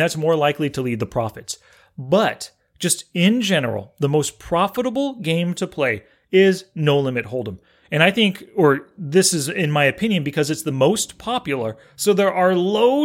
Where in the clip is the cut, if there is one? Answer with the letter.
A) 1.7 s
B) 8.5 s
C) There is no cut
C